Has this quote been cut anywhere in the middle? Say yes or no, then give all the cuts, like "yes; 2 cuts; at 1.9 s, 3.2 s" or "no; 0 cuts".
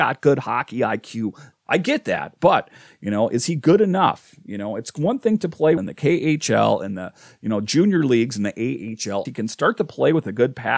yes; 3 cuts; at 1.5 s, 5.8 s, 9.3 s